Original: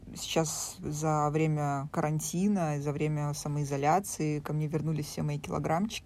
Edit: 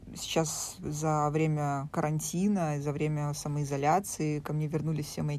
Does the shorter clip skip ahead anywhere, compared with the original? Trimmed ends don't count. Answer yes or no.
no